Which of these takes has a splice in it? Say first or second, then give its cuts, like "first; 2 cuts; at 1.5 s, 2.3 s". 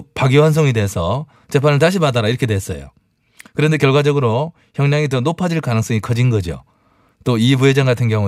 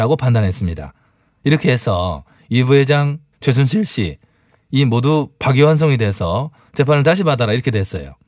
second; 1 cut; at 3.3 s